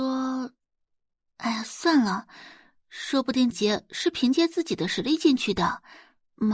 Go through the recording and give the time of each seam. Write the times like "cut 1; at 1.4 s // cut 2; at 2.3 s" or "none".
cut 1; at 3.5 s